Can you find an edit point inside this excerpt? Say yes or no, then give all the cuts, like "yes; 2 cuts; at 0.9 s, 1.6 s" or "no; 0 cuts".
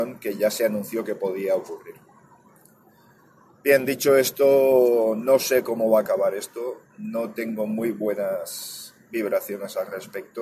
yes; 1 cut; at 6.8 s